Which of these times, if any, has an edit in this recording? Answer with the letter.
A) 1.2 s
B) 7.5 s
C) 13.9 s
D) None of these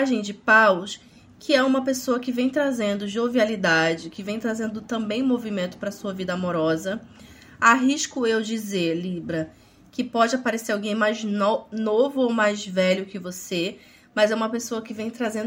D